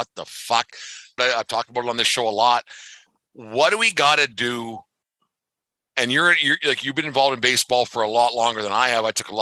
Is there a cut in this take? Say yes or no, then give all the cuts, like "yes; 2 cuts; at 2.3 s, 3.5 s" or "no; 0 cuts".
yes; 1 cut; at 1.2 s